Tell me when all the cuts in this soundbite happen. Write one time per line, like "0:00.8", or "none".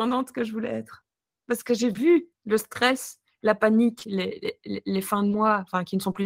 none